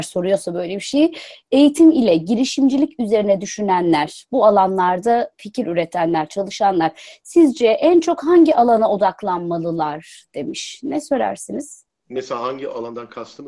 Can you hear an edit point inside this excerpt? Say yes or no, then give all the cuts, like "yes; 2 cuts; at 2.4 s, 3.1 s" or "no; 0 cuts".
no; 0 cuts